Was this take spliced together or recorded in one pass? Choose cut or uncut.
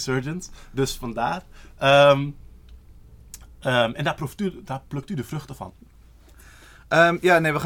uncut